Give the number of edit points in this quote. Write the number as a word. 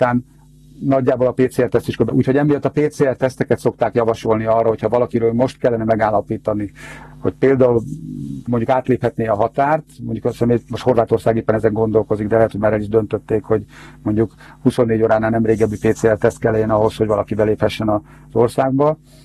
one